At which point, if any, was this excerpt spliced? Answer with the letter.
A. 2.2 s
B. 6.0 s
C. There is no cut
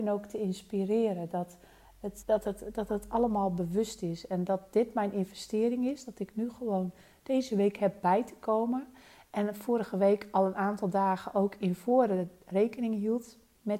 A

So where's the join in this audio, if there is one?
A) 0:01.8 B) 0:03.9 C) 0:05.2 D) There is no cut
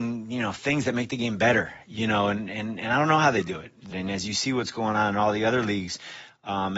B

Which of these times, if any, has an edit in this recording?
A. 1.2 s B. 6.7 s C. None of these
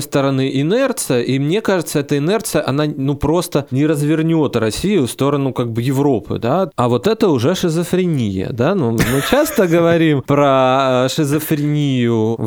B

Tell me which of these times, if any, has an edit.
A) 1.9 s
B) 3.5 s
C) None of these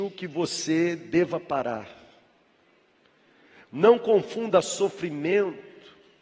C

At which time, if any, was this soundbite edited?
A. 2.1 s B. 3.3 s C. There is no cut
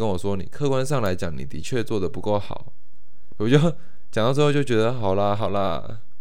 B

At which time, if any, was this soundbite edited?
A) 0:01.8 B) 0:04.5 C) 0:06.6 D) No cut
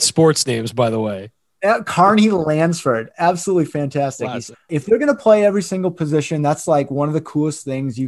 B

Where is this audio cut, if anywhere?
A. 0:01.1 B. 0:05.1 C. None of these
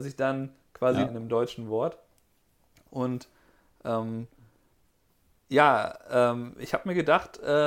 A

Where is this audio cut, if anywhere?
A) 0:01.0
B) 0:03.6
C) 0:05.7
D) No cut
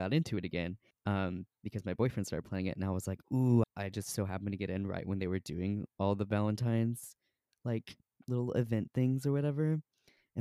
B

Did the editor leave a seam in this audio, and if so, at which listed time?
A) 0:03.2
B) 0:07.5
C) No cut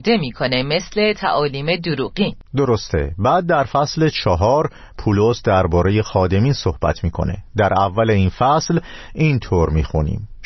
B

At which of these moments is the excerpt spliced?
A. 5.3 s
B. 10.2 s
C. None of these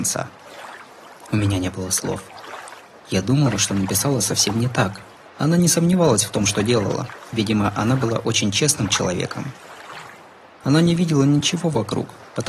A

